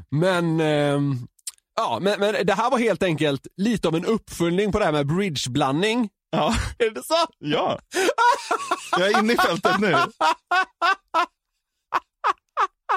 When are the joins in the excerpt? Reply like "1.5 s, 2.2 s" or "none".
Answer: 6.8 s